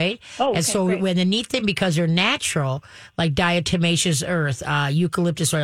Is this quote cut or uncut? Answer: uncut